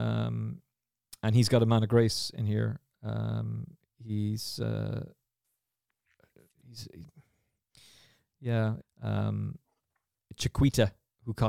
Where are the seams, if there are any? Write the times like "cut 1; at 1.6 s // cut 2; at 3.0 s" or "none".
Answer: cut 1; at 8.8 s